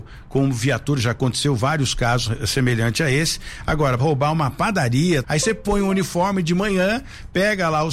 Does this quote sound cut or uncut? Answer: cut